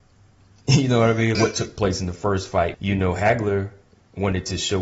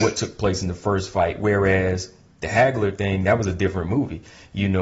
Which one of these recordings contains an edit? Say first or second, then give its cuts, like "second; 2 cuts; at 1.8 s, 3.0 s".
first; 2 cuts; at 1.3 s, 2.7 s